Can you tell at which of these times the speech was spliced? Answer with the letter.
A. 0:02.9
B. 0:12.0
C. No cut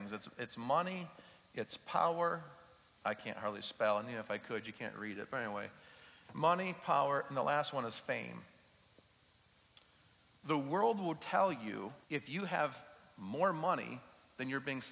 B